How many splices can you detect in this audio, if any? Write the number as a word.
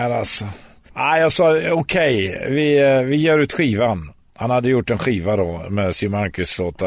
zero